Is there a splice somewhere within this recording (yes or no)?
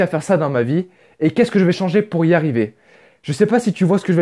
no